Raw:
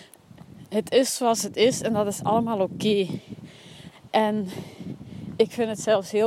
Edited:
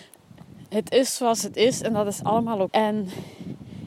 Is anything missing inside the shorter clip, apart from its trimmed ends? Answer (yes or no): yes